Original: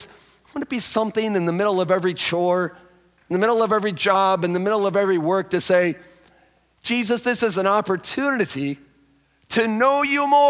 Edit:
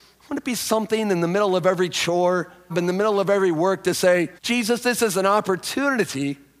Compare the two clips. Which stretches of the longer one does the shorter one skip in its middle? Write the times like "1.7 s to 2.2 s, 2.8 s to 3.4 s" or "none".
2.9 s to 4.4 s, 6.0 s to 6.8 s